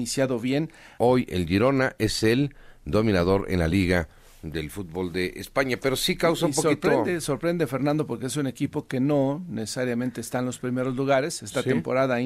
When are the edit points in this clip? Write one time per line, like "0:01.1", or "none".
0:01.0